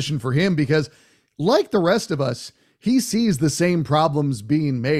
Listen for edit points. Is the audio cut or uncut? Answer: uncut